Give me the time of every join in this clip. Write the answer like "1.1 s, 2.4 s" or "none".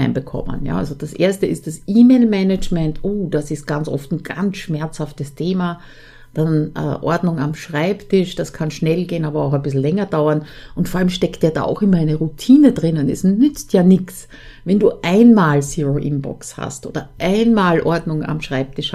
none